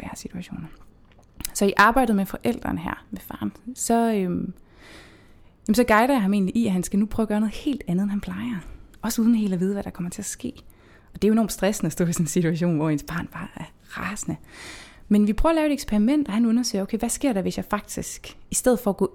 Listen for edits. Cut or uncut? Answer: uncut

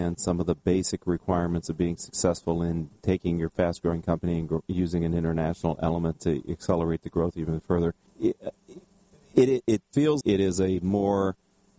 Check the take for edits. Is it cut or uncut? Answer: cut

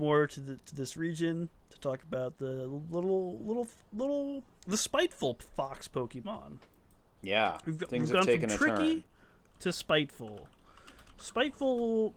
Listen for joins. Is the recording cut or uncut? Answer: uncut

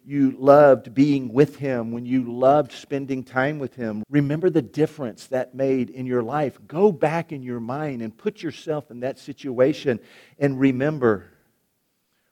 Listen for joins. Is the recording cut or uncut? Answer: cut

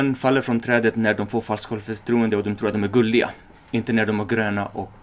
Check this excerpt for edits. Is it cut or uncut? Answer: uncut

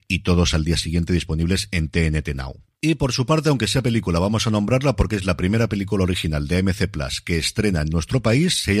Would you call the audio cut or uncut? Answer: uncut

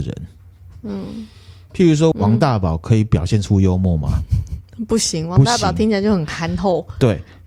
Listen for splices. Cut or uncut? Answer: cut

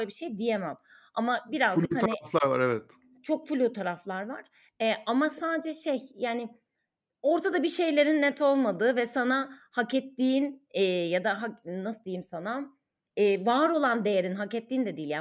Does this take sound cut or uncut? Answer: uncut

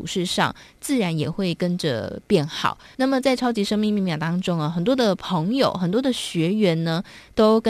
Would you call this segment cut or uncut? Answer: cut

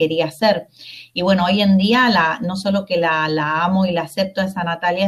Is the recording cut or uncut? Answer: uncut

